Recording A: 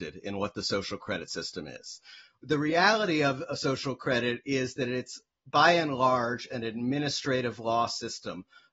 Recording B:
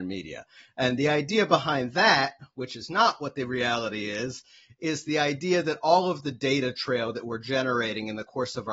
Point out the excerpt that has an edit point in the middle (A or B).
A